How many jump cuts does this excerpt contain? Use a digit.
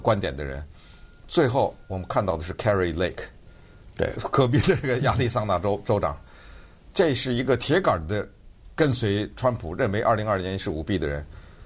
0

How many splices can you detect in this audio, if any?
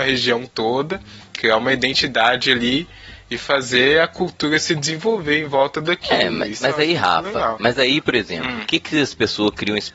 0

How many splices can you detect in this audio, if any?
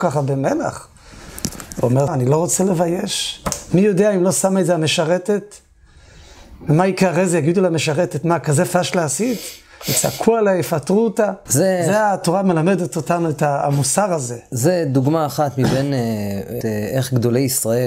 3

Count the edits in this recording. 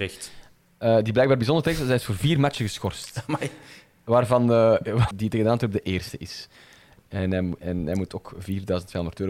1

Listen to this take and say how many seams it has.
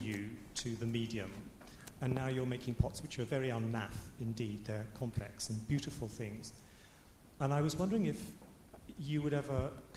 0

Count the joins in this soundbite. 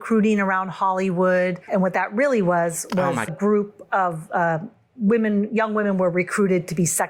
2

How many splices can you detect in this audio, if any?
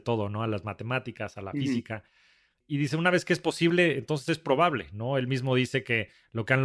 0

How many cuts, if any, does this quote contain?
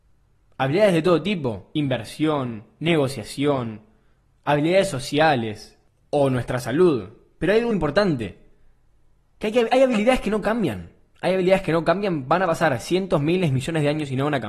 1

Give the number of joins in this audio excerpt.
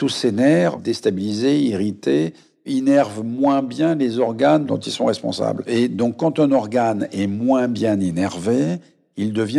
0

